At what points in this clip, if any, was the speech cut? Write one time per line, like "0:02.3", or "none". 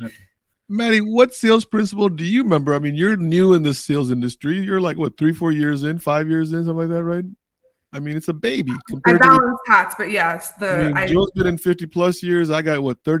none